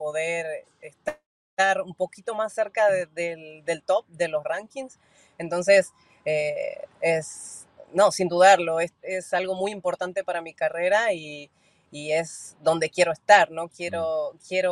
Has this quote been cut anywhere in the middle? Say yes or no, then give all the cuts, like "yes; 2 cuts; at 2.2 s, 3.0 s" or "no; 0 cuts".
yes; 1 cut; at 9.0 s